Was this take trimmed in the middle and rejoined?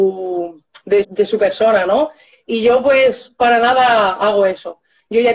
yes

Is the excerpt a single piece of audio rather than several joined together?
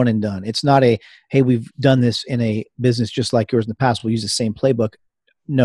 yes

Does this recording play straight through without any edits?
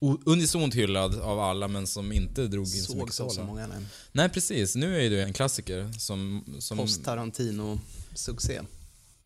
no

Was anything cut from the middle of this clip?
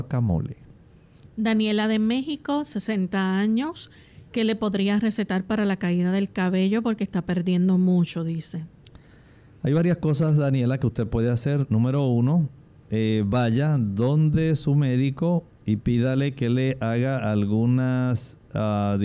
no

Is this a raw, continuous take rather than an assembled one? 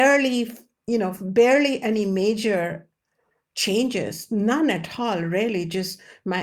yes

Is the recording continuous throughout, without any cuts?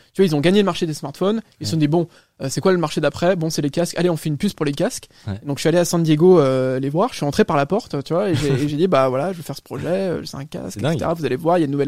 yes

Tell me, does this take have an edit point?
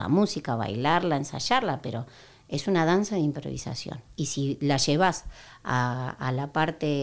no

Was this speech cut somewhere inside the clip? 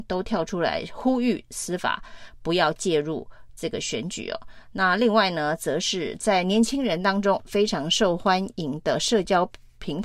no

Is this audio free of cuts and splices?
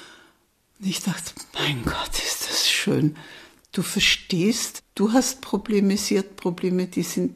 yes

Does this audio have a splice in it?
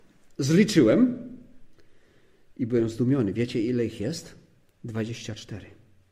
no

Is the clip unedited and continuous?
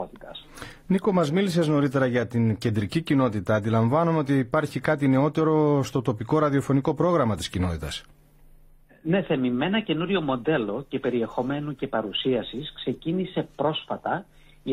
yes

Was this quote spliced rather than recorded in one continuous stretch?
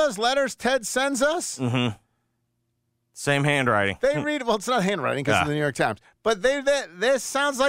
no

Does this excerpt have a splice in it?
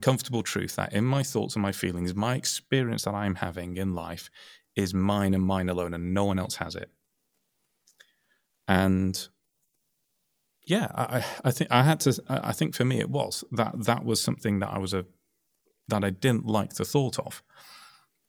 no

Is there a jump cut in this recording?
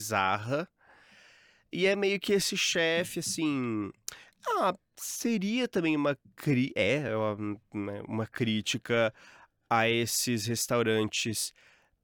no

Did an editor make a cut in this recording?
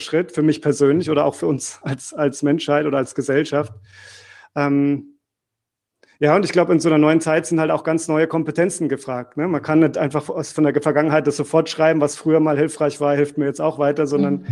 no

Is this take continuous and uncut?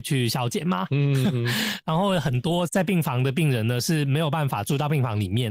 no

